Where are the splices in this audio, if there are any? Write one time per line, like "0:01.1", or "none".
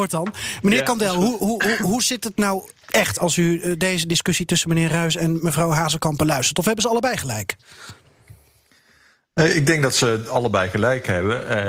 none